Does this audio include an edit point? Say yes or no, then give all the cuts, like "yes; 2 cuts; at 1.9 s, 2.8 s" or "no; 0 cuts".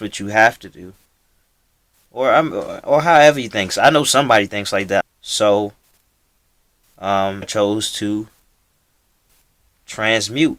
yes; 2 cuts; at 5.0 s, 7.4 s